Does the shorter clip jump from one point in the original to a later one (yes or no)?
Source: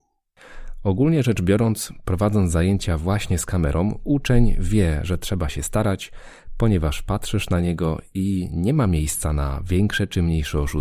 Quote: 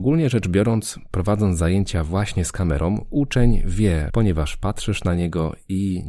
yes